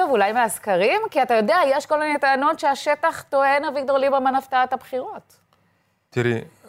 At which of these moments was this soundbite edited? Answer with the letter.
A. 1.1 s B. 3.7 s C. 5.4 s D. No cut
D